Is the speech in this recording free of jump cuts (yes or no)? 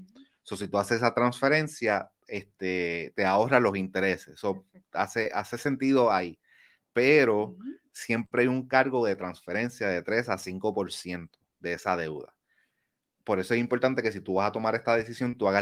yes